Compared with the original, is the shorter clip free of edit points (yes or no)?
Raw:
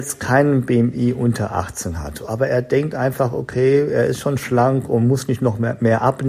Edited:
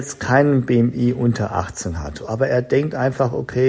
yes